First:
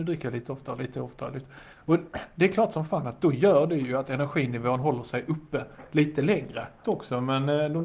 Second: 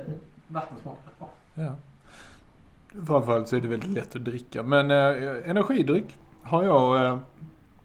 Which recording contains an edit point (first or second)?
first